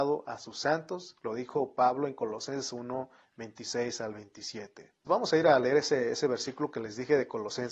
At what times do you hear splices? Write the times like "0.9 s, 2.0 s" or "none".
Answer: 5.1 s